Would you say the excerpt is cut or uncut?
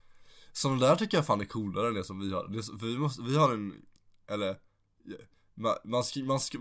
uncut